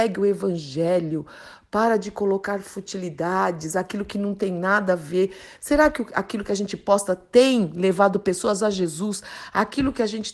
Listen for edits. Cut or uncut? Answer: uncut